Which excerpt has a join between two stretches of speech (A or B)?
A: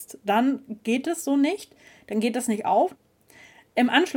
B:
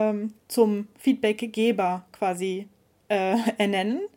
A